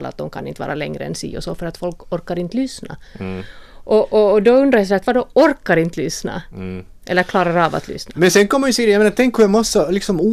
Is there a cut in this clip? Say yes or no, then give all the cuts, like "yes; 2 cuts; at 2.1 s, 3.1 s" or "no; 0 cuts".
no; 0 cuts